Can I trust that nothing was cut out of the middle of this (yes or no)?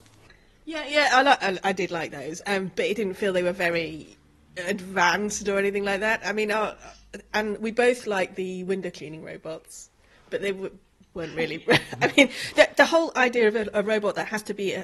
yes